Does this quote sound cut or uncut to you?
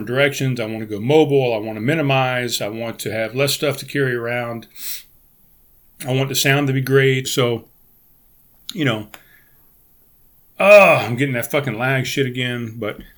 cut